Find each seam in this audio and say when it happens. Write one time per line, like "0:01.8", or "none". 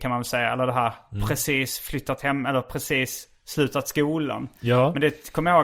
none